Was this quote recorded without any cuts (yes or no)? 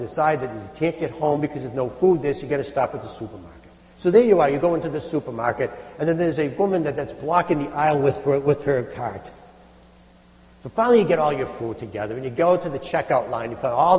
yes